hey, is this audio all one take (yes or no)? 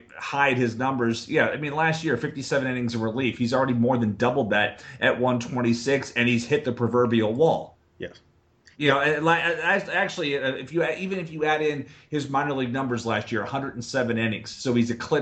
yes